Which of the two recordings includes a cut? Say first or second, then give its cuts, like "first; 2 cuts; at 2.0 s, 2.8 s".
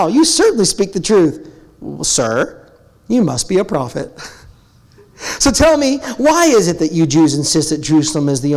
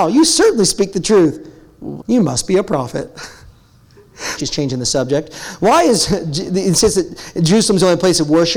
second; 2 cuts; at 2.0 s, 4.4 s